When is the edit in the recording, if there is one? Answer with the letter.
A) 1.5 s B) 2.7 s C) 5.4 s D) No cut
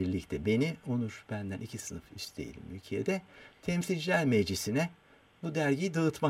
C